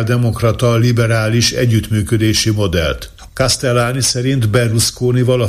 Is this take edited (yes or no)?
yes